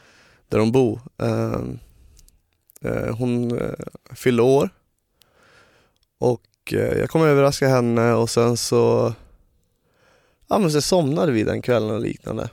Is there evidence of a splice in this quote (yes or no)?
no